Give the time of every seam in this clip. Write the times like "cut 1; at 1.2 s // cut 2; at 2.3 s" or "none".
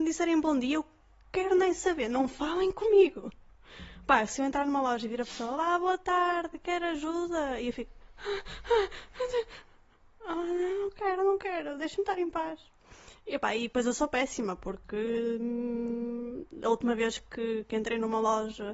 none